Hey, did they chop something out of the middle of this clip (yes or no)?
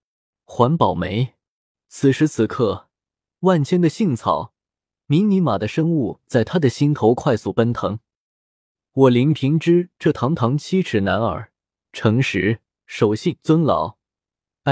yes